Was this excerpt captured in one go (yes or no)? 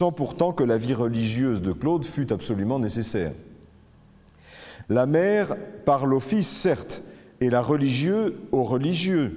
no